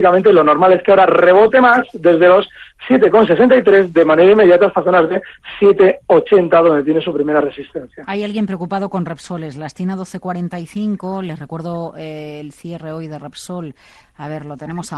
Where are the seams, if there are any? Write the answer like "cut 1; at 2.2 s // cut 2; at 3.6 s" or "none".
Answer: none